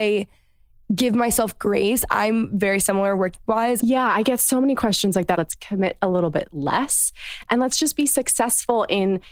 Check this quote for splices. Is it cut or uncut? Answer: cut